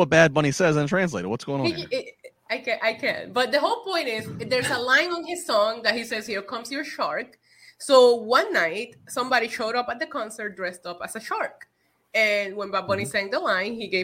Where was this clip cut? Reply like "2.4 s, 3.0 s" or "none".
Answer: none

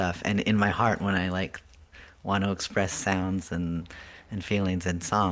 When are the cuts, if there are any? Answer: none

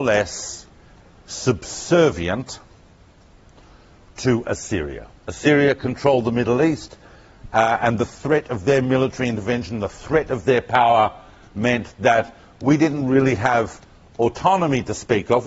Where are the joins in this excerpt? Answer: none

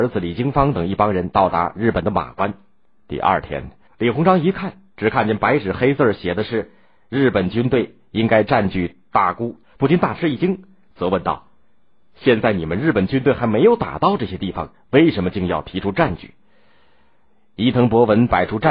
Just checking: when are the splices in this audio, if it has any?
3.9 s, 9.6 s

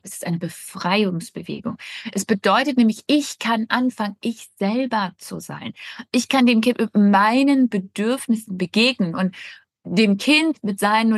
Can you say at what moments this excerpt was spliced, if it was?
none

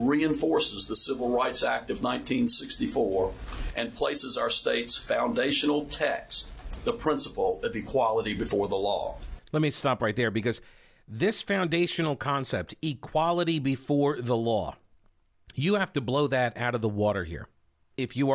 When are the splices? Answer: 6.8 s

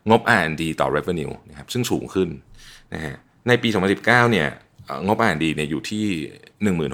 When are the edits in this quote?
none

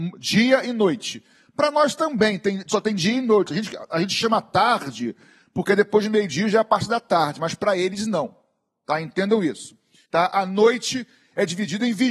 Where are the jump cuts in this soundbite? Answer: 10.0 s

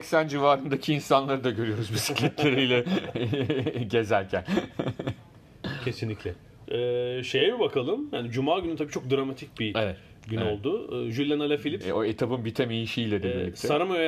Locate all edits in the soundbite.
6.6 s, 11.8 s

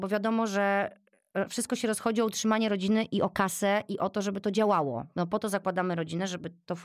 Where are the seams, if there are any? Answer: none

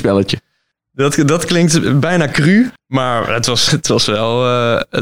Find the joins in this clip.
3.7 s

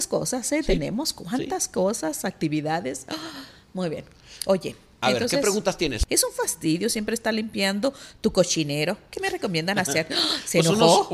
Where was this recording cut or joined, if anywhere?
6.0 s

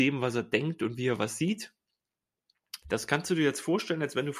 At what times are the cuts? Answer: 2.8 s

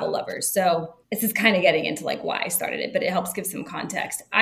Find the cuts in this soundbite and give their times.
1.0 s

